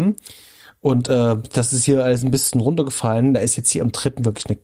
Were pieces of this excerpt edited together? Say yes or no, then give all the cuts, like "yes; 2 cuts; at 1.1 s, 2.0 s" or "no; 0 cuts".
no; 0 cuts